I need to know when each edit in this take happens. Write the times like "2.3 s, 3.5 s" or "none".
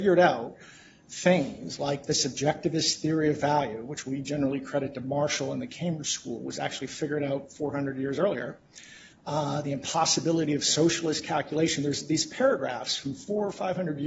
none